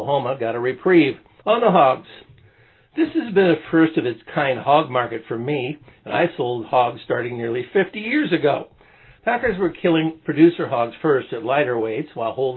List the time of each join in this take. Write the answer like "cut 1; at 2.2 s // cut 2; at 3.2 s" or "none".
cut 1; at 1.4 s // cut 2; at 9.2 s